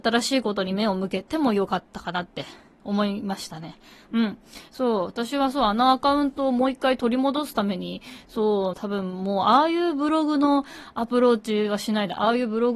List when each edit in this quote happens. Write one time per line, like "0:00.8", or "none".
0:08.7